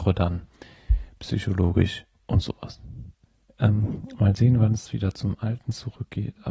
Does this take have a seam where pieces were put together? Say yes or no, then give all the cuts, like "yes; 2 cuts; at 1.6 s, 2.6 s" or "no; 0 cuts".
yes; 1 cut; at 3.5 s